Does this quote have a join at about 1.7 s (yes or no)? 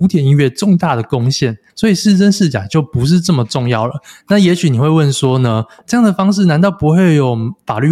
yes